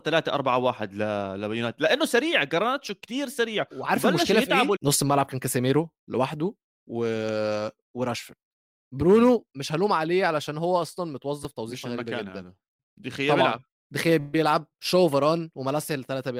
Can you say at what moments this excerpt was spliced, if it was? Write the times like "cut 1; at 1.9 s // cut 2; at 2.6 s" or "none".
cut 1; at 4.8 s // cut 2; at 12.8 s